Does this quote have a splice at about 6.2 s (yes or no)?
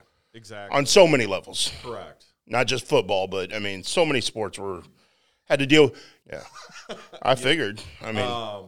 yes